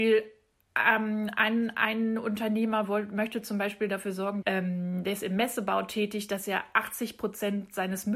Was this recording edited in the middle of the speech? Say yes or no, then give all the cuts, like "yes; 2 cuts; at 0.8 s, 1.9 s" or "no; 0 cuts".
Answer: yes; 1 cut; at 4.4 s